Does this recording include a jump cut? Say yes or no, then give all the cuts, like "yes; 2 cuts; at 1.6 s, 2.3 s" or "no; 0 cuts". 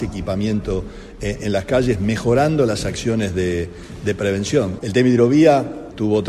yes; 1 cut; at 4.8 s